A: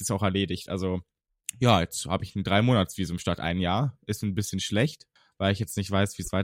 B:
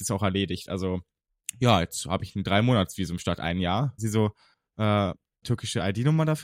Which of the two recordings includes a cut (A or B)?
B